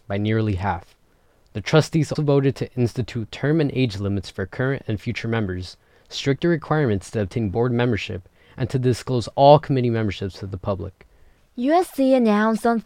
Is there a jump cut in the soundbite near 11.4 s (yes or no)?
yes